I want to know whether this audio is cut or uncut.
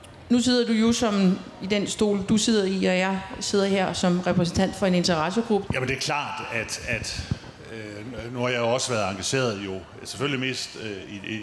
cut